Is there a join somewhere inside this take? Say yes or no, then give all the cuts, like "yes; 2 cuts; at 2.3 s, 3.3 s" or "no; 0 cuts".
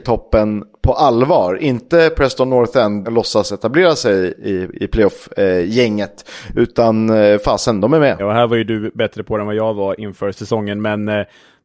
yes; 2 cuts; at 3.0 s, 8.2 s